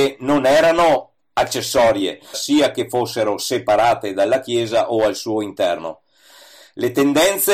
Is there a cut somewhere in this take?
yes; 1 cut; at 2.3 s

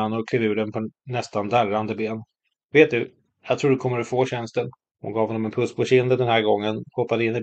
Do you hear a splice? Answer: yes; 2 cuts; at 2.6 s, 4.9 s

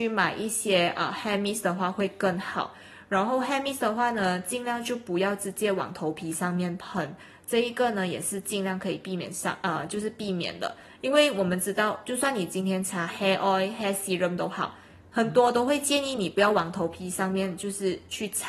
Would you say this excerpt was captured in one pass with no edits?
yes; 0 cuts

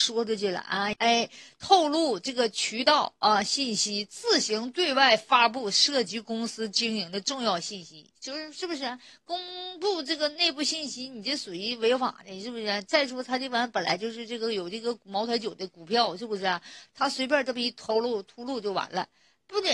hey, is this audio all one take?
yes; 0 cuts

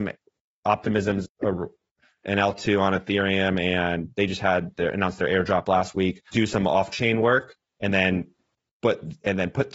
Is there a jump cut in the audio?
yes; 2 cuts; at 1.2 s, 6.3 s

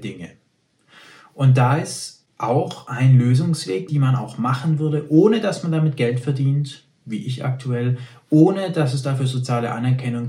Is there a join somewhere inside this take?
yes; 1 cut; at 3.9 s

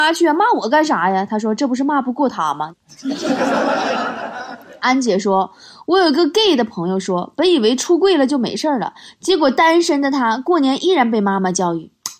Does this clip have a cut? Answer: yes; 1 cut; at 2.7 s

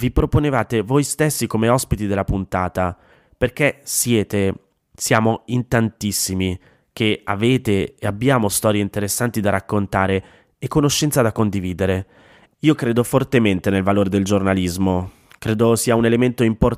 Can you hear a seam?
yes; 1 cut; at 12.5 s

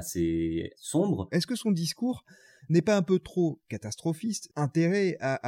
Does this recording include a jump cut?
yes; 2 cuts; at 1.3 s, 4.5 s

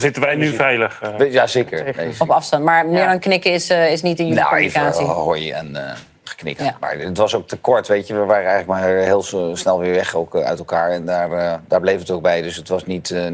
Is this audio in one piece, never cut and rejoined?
yes; 0 cuts

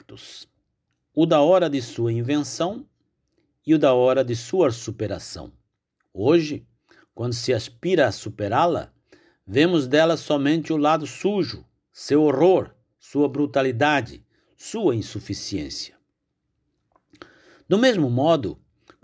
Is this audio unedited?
no; 1 cut; at 6.0 s

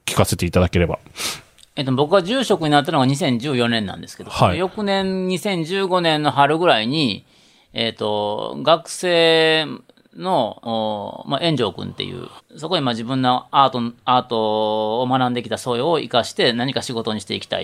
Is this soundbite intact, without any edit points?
no; 2 cuts; at 10.6 s, 12.4 s

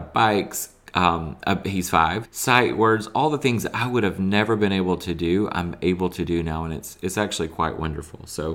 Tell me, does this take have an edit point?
yes; 1 cut; at 2.2 s

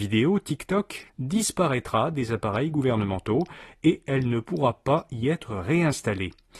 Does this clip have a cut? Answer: yes; 1 cut; at 1.1 s

